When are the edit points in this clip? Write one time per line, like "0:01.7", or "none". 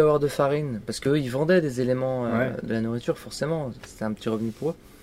none